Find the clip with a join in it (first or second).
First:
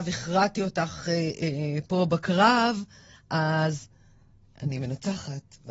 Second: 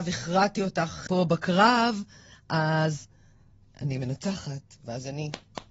second